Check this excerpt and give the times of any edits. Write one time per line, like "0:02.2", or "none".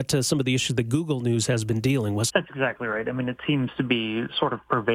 0:02.3